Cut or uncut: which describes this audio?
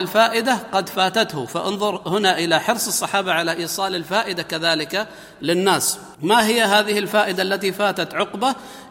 cut